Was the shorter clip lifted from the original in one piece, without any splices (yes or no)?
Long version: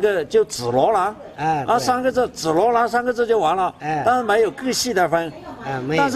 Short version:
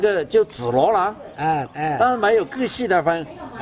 no